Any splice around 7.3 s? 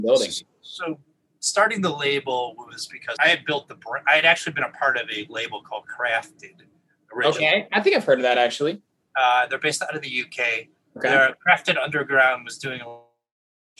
no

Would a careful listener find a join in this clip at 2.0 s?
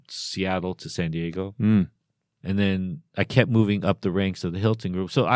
no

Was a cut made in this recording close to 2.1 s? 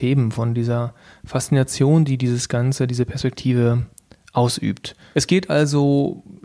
no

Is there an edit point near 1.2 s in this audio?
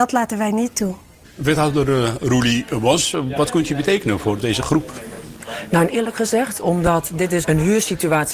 no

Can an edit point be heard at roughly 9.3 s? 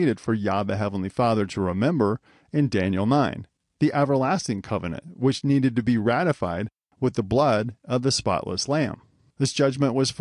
yes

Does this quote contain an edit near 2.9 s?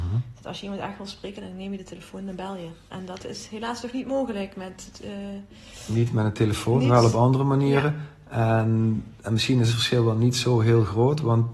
no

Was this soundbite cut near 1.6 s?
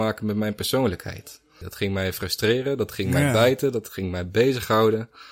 yes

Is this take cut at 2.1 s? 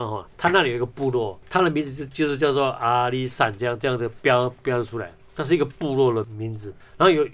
yes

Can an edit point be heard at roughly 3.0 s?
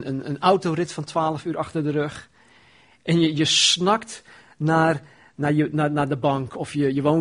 no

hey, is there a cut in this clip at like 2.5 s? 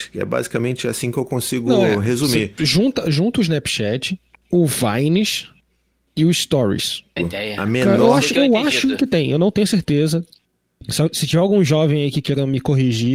no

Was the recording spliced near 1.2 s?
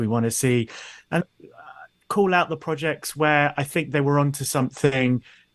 yes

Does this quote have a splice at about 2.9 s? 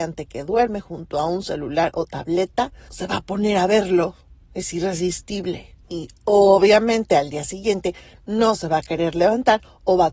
yes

